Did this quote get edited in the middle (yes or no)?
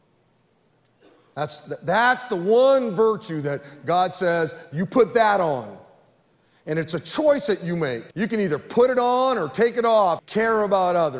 yes